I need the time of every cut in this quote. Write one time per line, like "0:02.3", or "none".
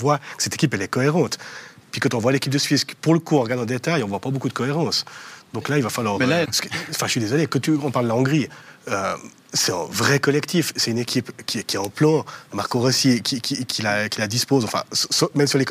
0:06.4

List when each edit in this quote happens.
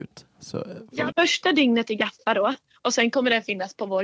0:01.1

